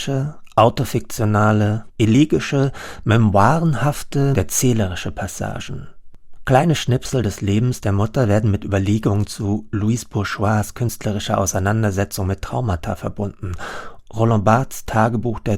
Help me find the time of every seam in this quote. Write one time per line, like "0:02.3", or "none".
0:01.9
0:04.3
0:14.1